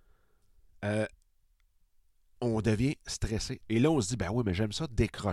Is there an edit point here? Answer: yes; 1 cut; at 3.6 s

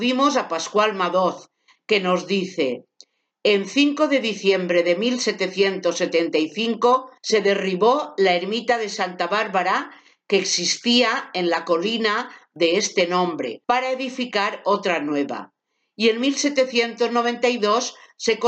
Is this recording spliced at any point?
yes; 2 cuts; at 7.2 s, 13.6 s

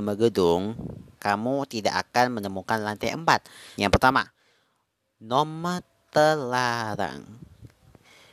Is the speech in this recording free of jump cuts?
no; 2 cuts; at 1.2 s, 3.8 s

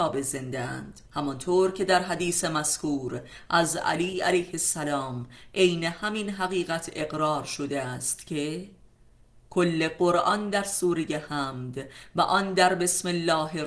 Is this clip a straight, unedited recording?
no; 1 cut; at 1.1 s

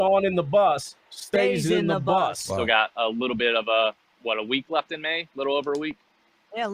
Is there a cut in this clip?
yes; 1 cut; at 2.5 s

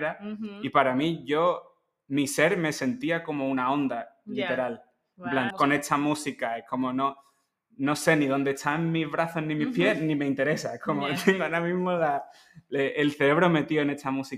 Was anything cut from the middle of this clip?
yes; 1 cut; at 5.5 s

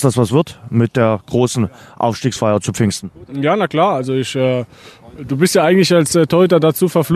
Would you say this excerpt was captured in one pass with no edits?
yes; 0 cuts

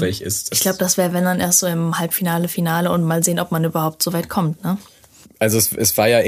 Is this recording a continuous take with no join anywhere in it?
yes; 0 cuts

